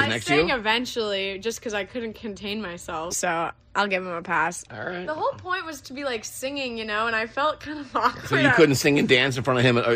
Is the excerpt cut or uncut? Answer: cut